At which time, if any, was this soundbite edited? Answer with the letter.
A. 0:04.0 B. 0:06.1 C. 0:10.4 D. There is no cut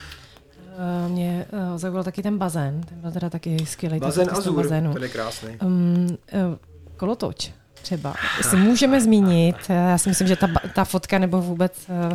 D